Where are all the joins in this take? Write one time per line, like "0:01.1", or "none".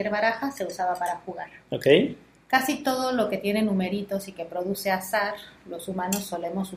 none